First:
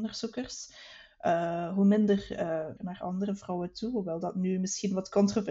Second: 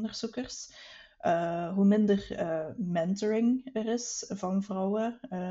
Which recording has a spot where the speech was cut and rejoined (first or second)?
first